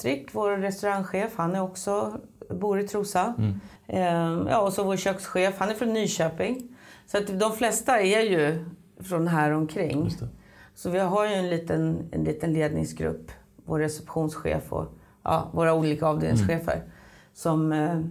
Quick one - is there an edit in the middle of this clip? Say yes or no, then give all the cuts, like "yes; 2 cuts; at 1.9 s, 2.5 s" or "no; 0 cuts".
yes; 1 cut; at 3.8 s